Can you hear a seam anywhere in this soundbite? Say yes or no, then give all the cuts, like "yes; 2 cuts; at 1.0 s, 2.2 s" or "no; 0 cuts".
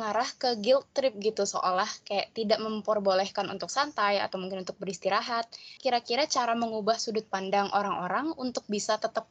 yes; 1 cut; at 5.8 s